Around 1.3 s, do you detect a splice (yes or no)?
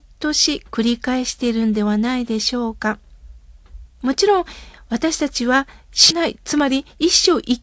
no